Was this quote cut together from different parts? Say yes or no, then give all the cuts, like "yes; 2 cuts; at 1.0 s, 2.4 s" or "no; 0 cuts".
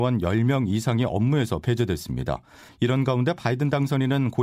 yes; 1 cut; at 2.7 s